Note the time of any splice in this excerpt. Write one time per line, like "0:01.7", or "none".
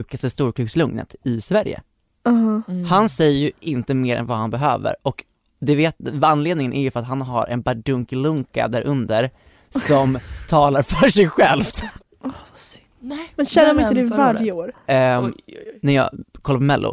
0:12.0
0:14.7